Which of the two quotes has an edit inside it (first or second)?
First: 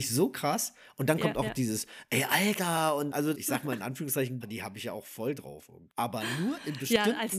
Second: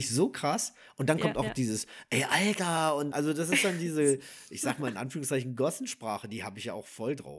first